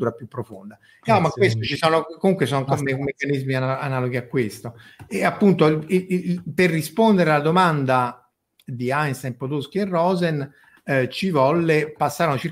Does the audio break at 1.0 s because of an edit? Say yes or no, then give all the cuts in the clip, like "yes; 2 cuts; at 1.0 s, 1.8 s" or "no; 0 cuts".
yes; 1 cut; at 1.0 s